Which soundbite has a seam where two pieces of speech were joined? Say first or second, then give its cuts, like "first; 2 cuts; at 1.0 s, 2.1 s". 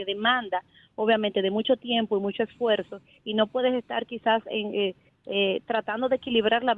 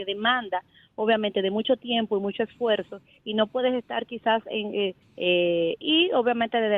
second; 1 cut; at 5.0 s